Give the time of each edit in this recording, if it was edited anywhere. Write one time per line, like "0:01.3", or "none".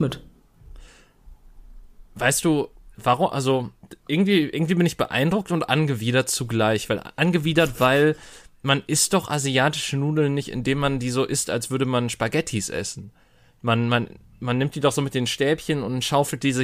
0:02.9